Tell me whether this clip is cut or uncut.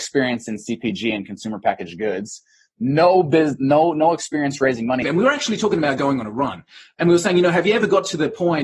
cut